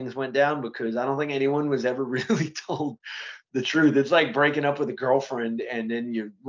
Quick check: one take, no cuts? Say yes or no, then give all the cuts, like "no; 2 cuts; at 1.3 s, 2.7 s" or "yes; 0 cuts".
yes; 0 cuts